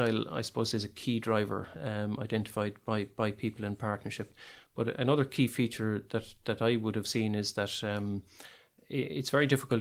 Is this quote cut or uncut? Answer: uncut